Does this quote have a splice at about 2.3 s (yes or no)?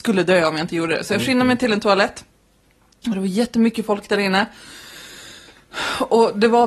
no